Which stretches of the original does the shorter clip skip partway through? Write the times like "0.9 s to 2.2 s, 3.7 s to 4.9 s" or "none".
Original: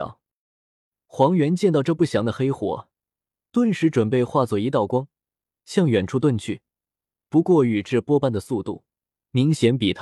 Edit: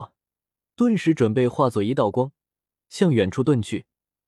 none